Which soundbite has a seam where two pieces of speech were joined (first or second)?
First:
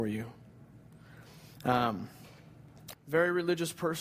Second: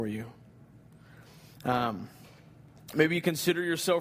first